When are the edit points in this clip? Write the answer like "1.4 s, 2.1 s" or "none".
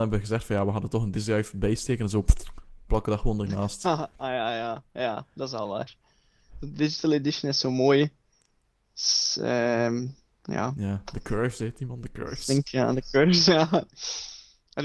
none